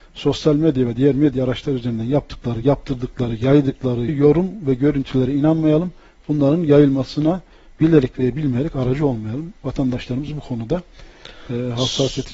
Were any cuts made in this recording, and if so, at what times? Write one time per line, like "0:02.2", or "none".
0:04.1